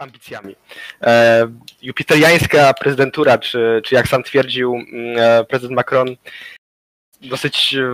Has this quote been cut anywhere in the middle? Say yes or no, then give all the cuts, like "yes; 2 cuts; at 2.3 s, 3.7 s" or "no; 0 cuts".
no; 0 cuts